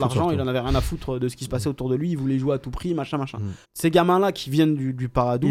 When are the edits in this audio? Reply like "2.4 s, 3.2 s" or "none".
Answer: 3.6 s

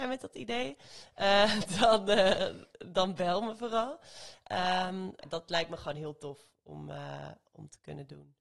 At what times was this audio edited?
5.2 s

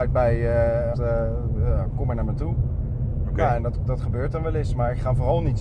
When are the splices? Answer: 0.9 s

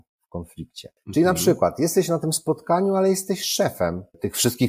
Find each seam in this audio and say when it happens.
none

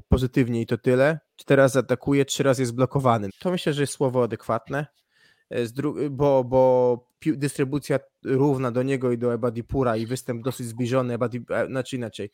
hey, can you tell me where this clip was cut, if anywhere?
3.3 s

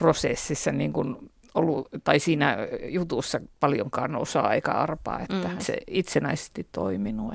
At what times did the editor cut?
5.6 s

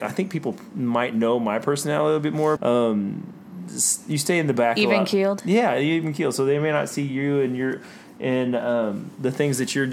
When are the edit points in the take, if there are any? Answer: 2.6 s

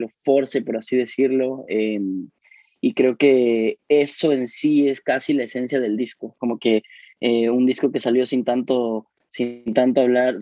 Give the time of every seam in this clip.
none

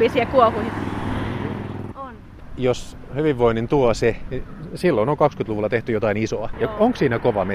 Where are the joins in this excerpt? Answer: 1.9 s, 4.3 s, 6.5 s

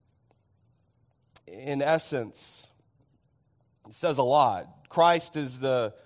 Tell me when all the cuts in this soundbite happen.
1.4 s

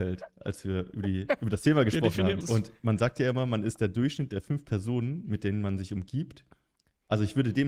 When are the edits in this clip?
2.4 s

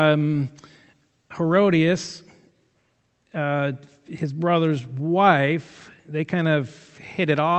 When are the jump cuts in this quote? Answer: none

